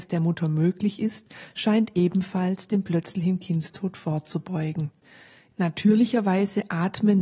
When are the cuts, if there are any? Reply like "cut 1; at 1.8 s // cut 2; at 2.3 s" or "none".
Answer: none